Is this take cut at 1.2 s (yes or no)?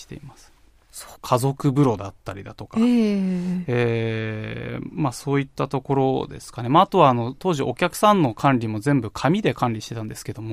yes